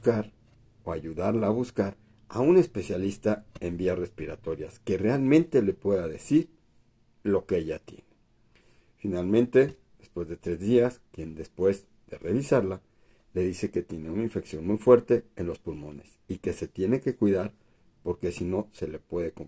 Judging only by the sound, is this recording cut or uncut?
cut